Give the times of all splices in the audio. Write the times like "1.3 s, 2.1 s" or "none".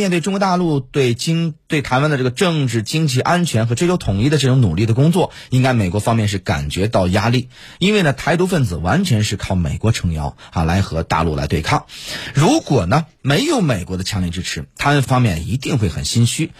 15.0 s